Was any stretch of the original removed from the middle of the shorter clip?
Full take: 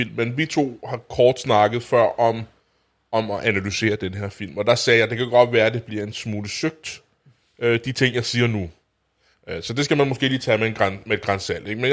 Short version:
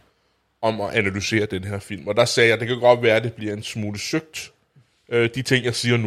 no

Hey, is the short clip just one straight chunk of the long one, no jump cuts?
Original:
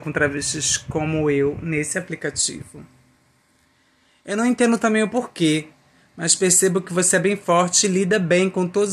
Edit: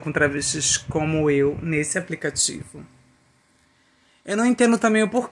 yes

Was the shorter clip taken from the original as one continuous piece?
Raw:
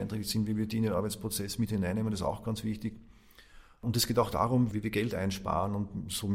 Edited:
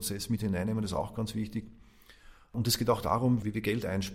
yes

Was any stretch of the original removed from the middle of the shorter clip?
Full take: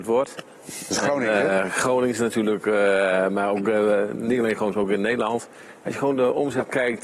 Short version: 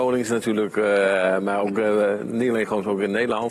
no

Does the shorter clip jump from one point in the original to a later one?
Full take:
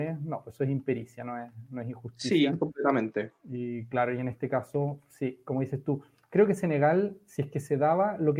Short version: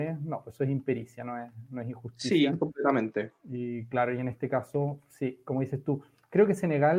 no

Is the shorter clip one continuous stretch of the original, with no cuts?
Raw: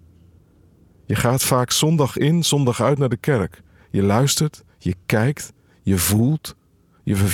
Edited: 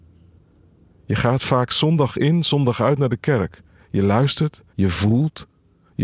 no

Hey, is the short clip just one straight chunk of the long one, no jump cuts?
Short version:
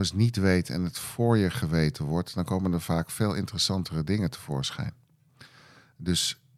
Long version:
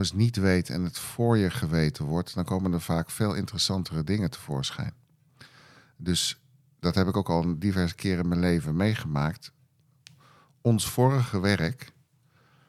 yes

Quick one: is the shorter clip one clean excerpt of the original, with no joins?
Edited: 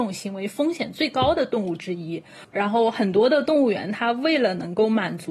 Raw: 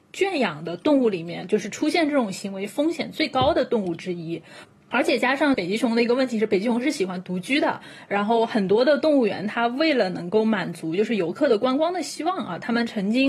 no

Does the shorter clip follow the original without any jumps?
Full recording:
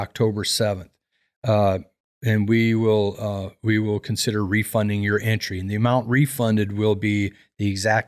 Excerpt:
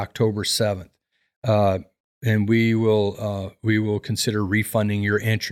yes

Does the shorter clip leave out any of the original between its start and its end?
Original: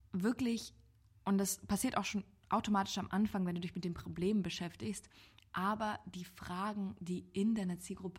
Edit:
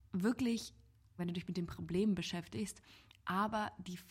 yes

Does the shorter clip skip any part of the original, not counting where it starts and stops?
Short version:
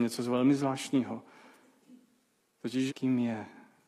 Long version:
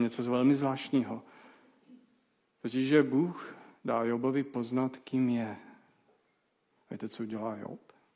yes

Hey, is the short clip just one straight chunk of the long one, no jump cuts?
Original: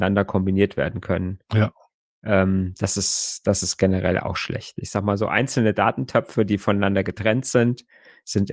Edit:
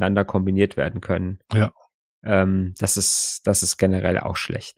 yes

